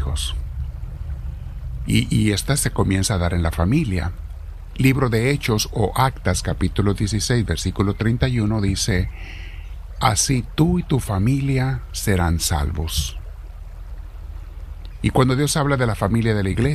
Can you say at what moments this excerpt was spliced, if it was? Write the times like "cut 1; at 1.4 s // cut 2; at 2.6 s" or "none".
cut 1; at 1.8 s // cut 2; at 10.0 s